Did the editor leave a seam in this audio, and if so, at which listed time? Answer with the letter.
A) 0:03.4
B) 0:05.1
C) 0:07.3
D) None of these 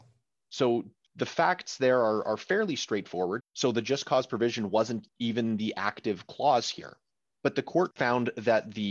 A